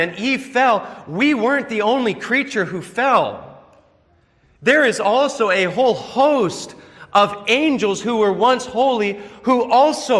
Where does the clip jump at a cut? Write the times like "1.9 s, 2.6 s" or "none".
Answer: none

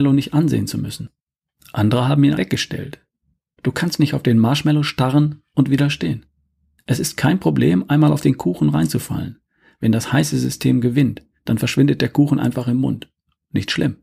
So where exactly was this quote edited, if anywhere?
2.4 s, 6.8 s

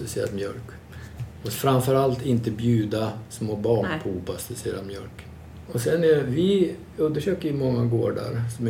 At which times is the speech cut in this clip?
5.7 s

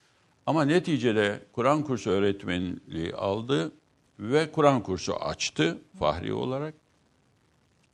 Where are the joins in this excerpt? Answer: none

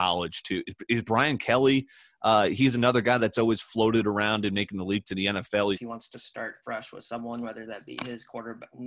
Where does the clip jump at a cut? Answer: 5.7 s

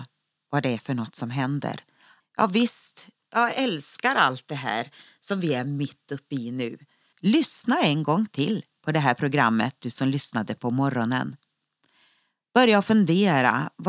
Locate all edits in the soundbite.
2.2 s, 7.1 s

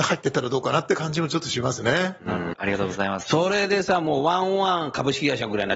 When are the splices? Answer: 2.5 s

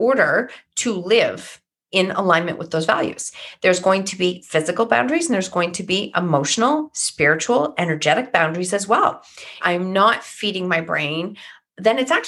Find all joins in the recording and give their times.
9.6 s

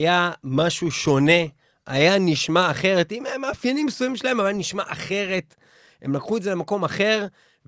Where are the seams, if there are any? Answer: none

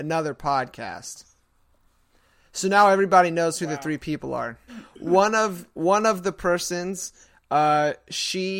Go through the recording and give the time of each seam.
4.7 s

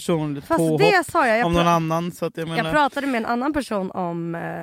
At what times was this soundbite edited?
none

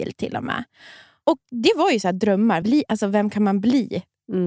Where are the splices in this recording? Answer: 2.6 s

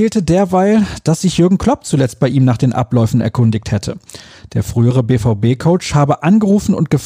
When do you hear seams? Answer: none

